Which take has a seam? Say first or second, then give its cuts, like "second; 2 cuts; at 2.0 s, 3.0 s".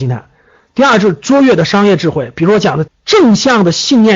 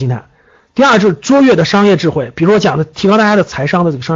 first; 1 cut; at 2.9 s